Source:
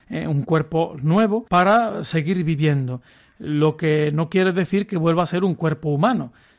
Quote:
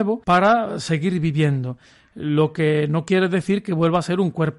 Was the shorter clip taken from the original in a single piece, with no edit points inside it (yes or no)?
yes